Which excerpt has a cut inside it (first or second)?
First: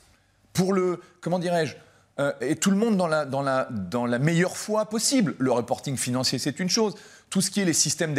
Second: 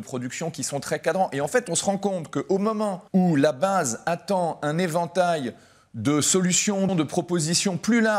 second